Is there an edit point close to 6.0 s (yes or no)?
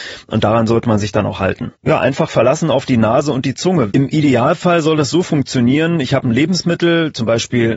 no